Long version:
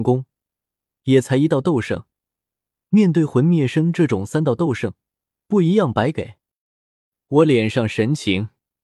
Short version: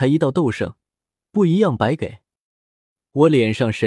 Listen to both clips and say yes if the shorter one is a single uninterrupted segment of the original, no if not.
no